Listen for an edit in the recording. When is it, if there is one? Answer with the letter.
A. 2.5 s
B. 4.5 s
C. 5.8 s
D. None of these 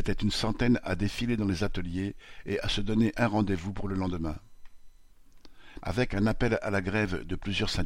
C